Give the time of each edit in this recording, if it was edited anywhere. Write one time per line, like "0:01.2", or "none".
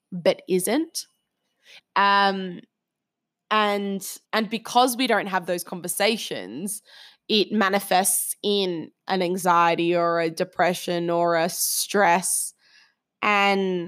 0:01.8
0:04.3